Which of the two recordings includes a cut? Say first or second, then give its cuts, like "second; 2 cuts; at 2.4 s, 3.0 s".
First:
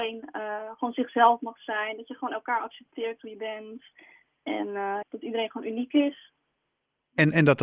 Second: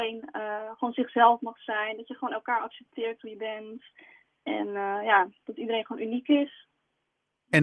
first; 1 cut; at 5.0 s